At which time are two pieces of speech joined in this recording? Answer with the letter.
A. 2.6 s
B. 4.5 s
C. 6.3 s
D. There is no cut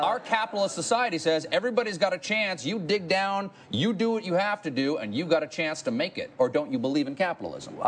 D